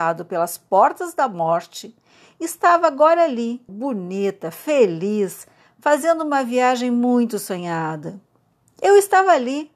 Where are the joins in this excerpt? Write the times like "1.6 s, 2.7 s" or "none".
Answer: 3.7 s